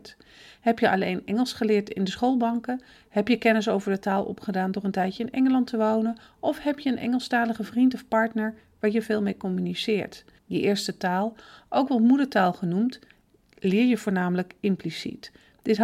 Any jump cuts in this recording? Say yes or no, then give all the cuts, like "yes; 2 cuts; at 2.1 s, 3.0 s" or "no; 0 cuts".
yes; 1 cut; at 10.4 s